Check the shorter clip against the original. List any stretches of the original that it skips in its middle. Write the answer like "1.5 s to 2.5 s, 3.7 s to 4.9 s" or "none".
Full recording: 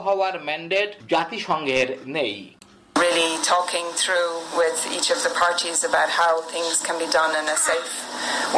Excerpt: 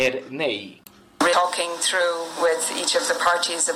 3.1 s to 3.5 s